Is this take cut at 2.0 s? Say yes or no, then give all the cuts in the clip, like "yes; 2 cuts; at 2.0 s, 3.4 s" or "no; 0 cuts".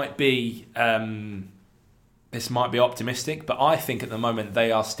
no; 0 cuts